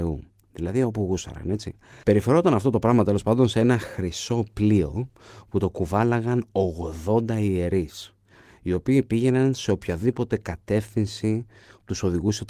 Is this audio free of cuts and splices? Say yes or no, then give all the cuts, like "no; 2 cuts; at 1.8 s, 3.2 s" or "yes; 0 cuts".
no; 1 cut; at 2.0 s